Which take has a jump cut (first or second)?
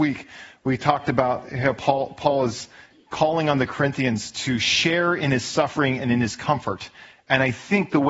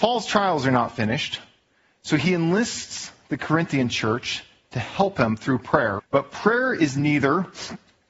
second